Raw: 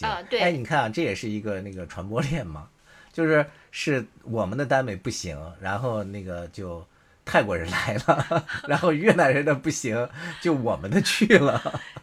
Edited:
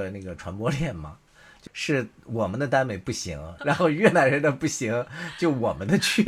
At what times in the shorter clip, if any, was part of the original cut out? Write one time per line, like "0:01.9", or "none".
0:01.7
0:03.6